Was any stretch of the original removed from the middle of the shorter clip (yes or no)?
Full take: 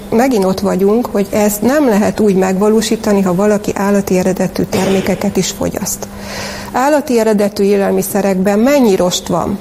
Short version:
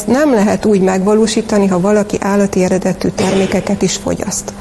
no